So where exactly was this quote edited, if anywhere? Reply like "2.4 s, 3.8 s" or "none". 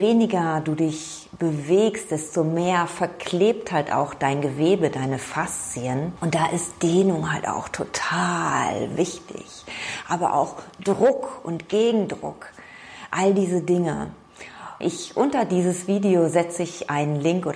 14.8 s